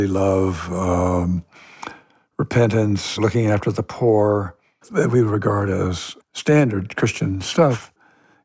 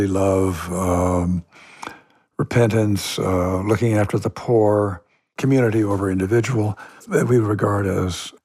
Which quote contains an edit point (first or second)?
first